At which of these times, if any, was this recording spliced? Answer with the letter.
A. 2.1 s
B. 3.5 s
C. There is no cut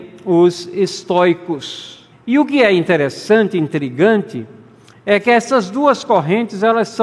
A